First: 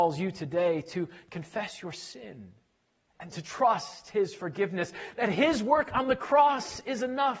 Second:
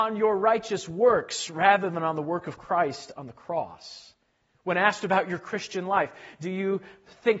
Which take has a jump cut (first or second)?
first